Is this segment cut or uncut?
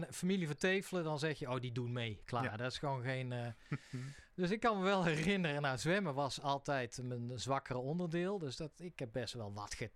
uncut